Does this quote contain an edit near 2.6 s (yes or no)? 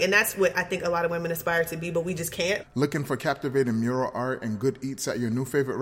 yes